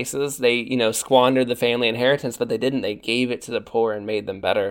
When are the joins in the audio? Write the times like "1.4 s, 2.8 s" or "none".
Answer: none